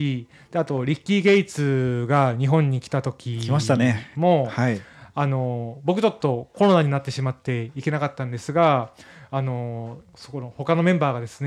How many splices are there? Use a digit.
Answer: 0